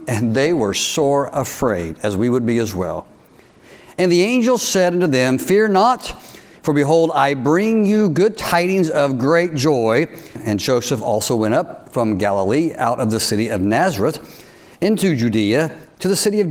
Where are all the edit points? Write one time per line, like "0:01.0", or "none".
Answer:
0:10.4